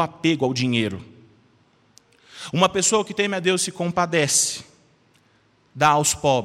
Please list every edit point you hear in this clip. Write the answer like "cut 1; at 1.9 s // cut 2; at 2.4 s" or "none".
none